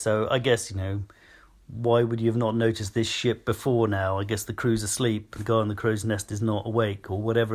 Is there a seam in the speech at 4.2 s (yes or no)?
no